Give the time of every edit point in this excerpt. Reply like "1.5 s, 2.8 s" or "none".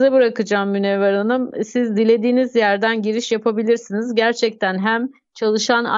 none